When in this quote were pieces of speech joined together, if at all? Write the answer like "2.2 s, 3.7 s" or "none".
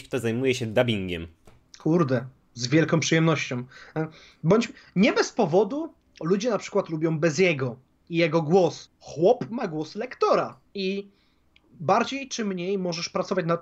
8.9 s, 10.7 s